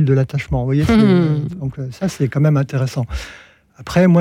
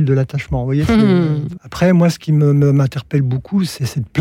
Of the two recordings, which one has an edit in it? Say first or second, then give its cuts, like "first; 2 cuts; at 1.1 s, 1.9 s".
second; 1 cut; at 1.6 s